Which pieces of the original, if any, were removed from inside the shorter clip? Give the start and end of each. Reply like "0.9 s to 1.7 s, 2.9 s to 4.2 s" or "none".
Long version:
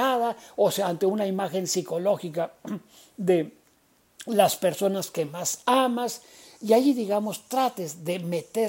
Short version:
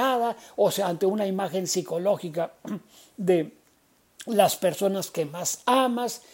none